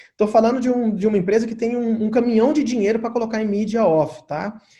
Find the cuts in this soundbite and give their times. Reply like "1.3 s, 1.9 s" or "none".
none